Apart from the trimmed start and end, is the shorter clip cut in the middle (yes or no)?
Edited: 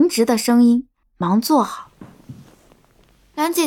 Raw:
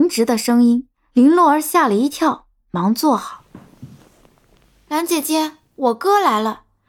yes